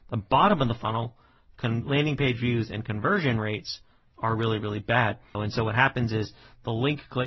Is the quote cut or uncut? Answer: cut